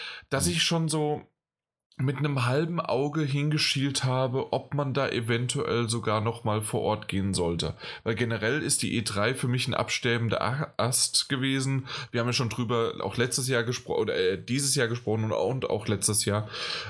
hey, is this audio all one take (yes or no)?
yes